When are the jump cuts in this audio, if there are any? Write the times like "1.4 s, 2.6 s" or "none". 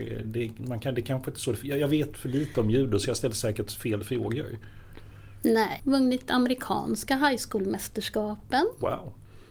5.8 s